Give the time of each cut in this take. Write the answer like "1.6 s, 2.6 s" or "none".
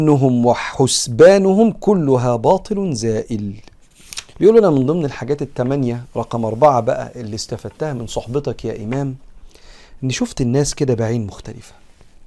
4.3 s